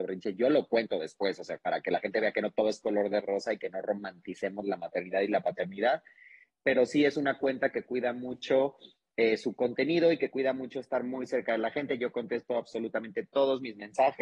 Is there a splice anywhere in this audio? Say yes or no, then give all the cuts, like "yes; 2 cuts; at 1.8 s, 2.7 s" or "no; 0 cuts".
no; 0 cuts